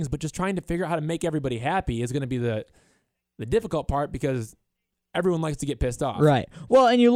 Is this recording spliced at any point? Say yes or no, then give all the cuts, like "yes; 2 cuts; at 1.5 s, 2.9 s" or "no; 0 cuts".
no; 0 cuts